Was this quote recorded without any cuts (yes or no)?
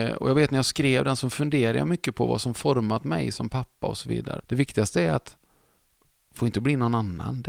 no